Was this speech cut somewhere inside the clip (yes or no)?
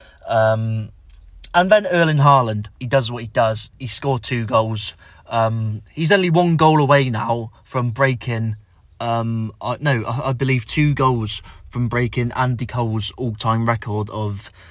yes